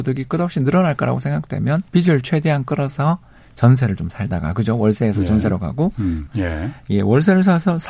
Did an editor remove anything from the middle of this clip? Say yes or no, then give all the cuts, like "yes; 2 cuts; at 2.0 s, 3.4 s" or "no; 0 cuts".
yes; 2 cuts; at 1.9 s, 6.3 s